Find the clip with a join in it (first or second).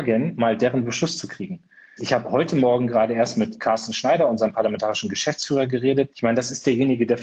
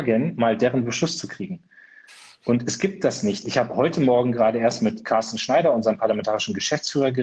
first